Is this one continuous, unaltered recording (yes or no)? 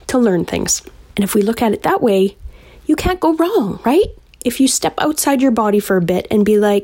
yes